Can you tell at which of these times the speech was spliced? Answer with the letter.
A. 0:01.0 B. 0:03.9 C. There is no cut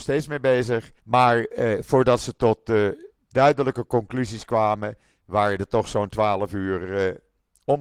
A